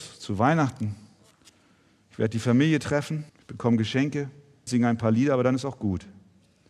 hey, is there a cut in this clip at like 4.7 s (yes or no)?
yes